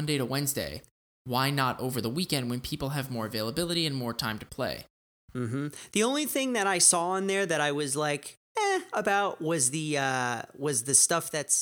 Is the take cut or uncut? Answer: cut